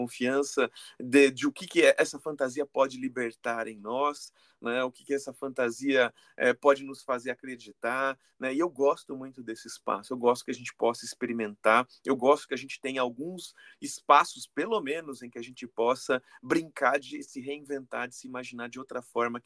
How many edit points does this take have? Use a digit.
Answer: 0